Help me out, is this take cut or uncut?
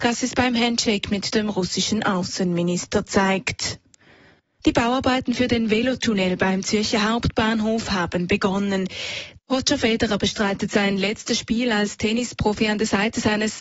cut